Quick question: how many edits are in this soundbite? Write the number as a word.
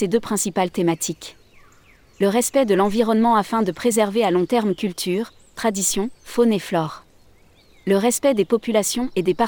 zero